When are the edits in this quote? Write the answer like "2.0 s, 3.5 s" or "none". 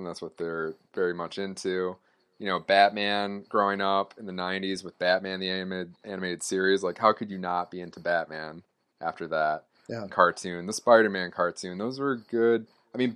10.1 s